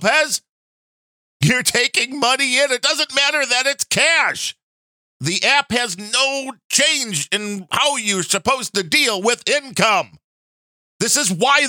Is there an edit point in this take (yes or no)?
no